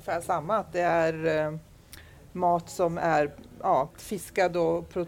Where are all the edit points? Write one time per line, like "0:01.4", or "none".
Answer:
0:03.9